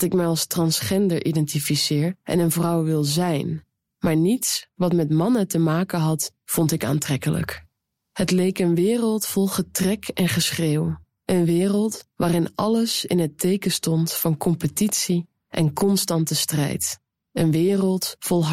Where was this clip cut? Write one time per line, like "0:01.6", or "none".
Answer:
none